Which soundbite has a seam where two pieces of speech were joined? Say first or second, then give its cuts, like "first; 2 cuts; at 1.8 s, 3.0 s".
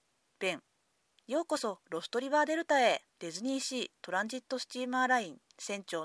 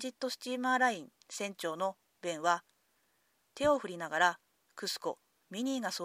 first; 1 cut; at 3.1 s